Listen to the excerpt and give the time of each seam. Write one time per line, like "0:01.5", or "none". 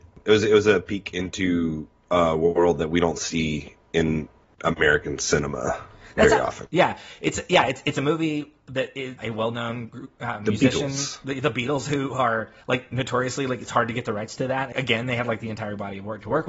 0:06.7
0:09.2
0:14.7